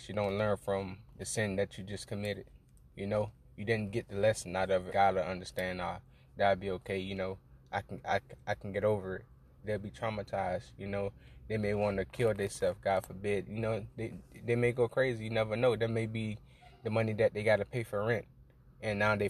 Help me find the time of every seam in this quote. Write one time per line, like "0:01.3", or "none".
0:04.9
0:09.6

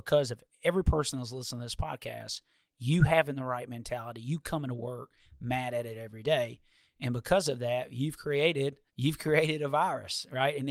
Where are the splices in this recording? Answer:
0:08.9

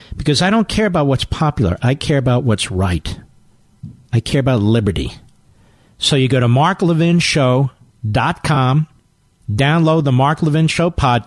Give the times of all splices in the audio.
0:05.9

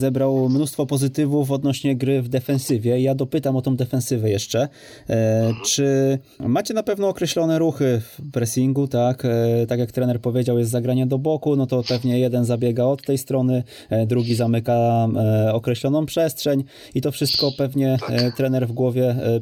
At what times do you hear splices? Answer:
none

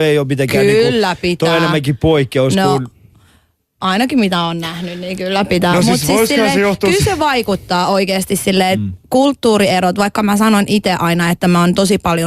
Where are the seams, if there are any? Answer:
none

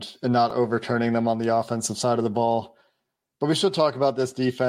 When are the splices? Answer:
none

